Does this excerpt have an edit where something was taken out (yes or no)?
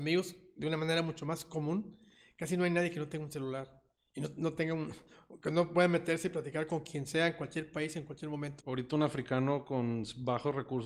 yes